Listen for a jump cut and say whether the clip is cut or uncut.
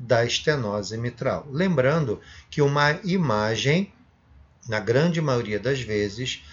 uncut